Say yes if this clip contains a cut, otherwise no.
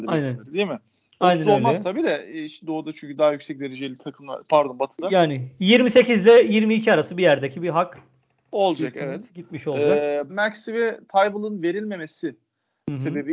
yes